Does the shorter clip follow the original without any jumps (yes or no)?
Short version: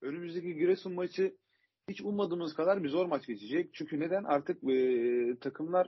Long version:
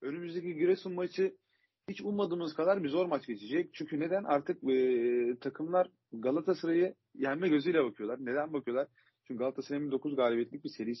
yes